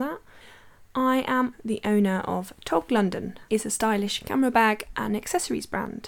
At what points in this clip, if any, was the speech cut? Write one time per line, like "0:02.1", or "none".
0:01.5
0:03.5